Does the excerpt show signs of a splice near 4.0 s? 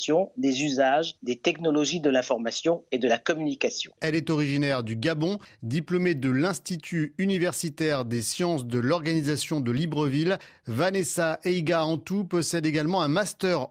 yes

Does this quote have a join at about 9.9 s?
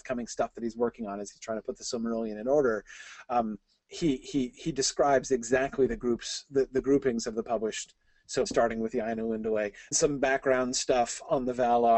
yes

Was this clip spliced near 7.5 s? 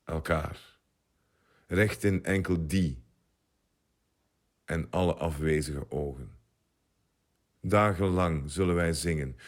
yes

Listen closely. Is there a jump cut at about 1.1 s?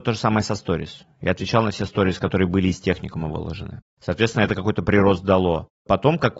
no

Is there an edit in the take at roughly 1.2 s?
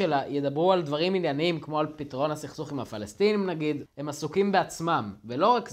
no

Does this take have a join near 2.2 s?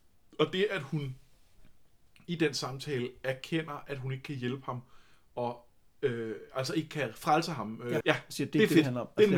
no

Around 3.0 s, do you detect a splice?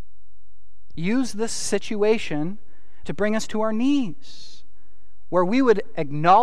yes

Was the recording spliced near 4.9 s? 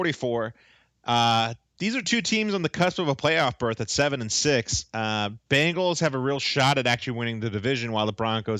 no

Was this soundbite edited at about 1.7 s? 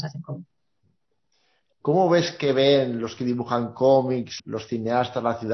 yes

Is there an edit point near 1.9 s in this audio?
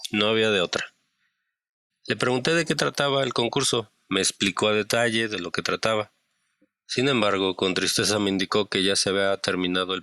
yes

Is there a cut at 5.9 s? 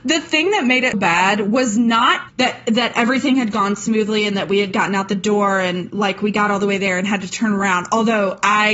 no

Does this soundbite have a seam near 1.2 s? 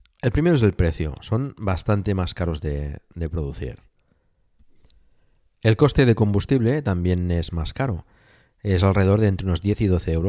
no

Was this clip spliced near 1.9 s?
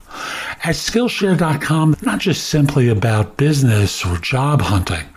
yes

